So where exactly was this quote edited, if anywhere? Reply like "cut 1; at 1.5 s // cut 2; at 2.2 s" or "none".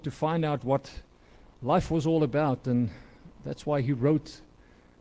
none